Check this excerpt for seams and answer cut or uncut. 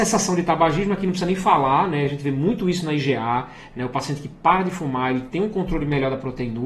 uncut